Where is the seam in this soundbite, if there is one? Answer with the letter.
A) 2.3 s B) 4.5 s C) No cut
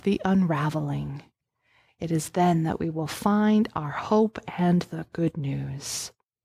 C